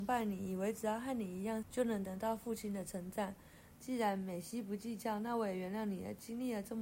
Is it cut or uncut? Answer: cut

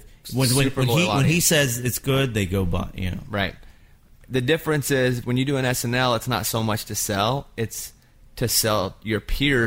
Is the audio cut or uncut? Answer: uncut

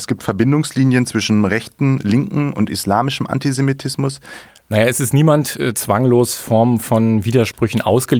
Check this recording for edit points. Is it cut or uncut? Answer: cut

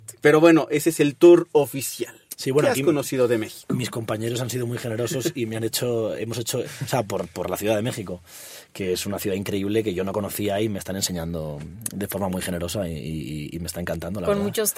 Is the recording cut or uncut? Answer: cut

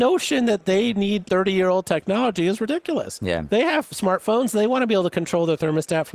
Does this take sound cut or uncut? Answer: cut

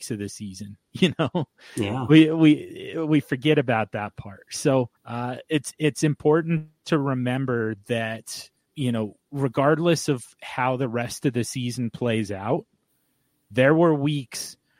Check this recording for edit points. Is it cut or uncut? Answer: cut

